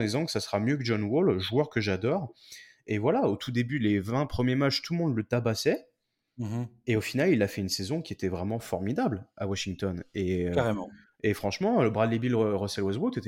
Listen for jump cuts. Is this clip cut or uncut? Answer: uncut